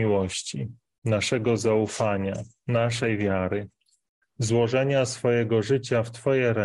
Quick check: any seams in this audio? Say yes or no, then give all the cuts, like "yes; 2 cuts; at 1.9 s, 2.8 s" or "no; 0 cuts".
yes; 1 cut; at 4.2 s